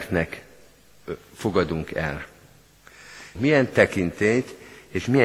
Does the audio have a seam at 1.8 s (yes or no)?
no